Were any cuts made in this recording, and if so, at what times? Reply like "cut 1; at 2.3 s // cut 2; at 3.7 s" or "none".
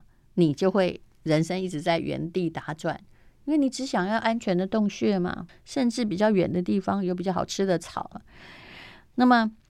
cut 1; at 5.5 s // cut 2; at 8.1 s